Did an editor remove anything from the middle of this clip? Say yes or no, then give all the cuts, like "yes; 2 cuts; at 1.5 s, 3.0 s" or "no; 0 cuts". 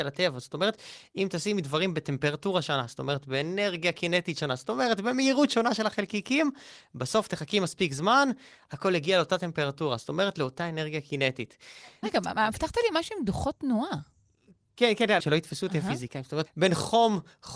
yes; 3 cuts; at 12.0 s, 15.2 s, 16.5 s